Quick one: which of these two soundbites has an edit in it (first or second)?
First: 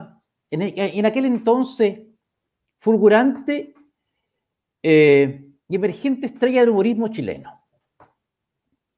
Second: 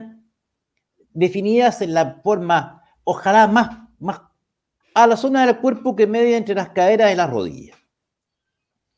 second